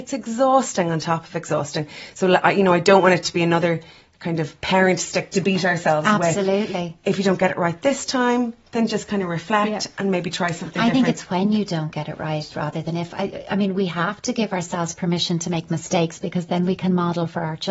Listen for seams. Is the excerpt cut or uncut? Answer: uncut